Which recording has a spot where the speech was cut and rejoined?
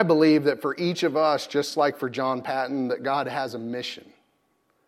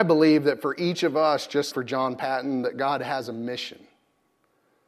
second; 1 cut; at 1.7 s

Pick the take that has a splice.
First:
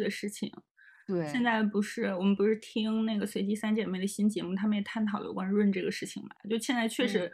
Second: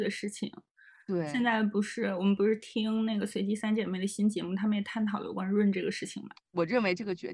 second; 1 cut; at 6.4 s

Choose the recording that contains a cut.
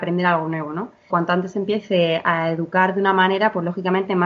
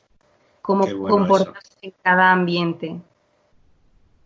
first; 1 cut; at 1.1 s

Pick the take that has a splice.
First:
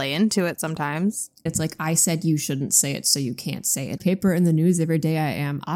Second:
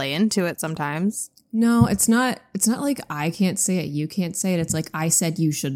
first; 2 cuts; at 1.5 s, 4.0 s

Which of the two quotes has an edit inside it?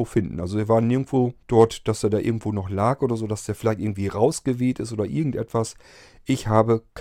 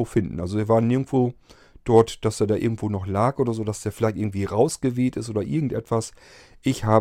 first; 1 cut; at 1.4 s

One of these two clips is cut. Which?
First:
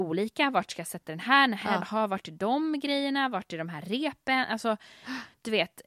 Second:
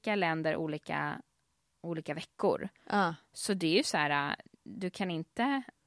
first; 1 cut; at 1.8 s

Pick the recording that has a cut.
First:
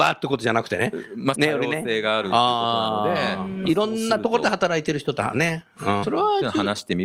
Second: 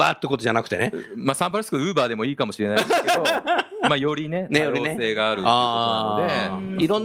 first; 2 cuts; at 1.3 s, 6.0 s

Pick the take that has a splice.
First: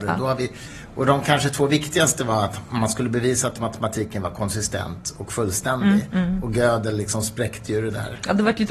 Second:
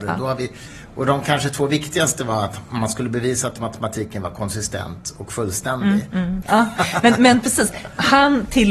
second; 1 cut; at 6.4 s

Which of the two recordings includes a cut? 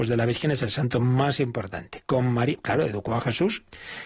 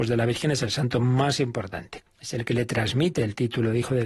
second; 1 cut; at 2.1 s

